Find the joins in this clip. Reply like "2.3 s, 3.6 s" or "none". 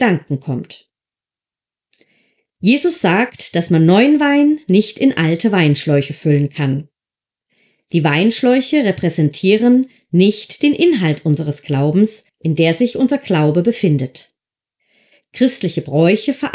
12.3 s